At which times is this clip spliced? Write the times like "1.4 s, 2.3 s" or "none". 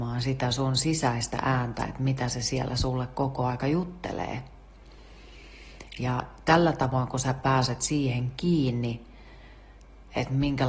none